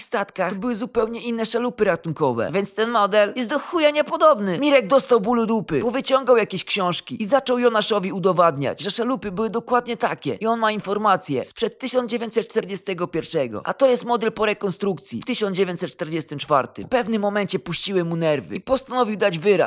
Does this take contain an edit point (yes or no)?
yes